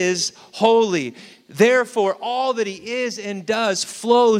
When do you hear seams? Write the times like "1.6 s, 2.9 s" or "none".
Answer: none